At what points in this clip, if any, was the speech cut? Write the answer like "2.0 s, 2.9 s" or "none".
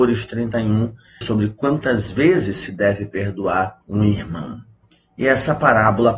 1.2 s, 3.8 s